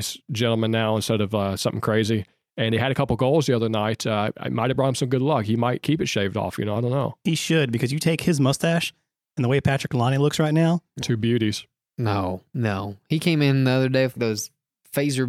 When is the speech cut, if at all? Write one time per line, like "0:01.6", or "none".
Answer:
0:11.0
0:14.2